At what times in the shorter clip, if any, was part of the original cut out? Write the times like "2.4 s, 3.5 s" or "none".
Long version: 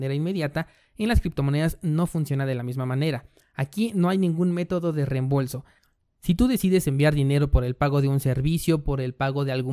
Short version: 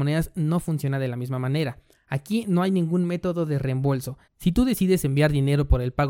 4.3 s